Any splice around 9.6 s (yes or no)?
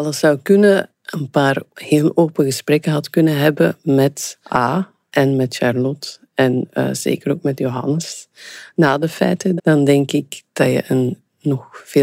yes